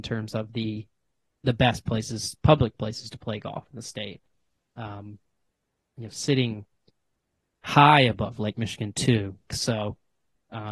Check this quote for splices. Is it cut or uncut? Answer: cut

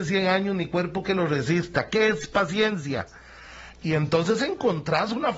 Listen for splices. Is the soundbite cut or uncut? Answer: cut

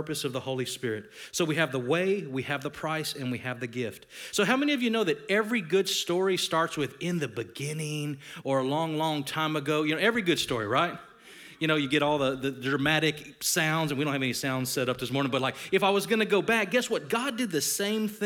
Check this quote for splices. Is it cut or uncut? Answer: uncut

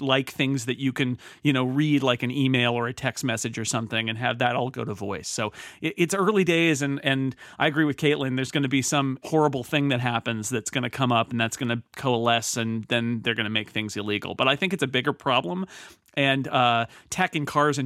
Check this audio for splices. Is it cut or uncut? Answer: cut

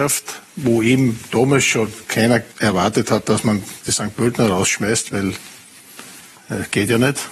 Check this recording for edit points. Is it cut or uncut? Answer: cut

